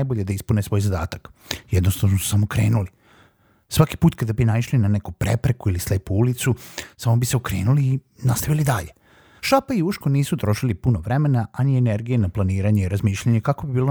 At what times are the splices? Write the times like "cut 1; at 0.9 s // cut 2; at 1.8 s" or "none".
cut 1; at 9.4 s